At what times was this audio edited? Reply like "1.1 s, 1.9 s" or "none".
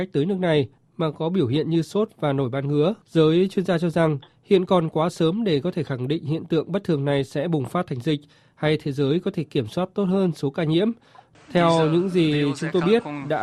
3.0 s, 11.3 s